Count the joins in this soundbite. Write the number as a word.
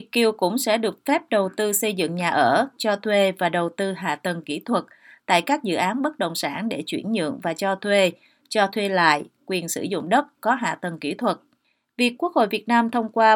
one